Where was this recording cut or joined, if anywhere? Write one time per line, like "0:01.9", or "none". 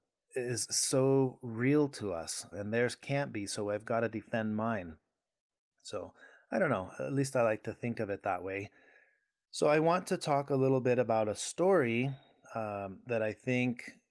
0:02.5